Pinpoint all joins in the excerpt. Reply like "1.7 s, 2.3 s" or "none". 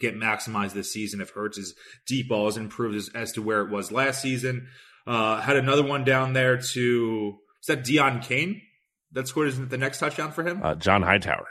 none